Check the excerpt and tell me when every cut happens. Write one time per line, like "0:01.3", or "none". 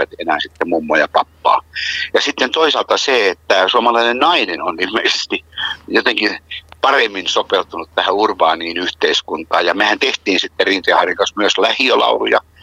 0:02.1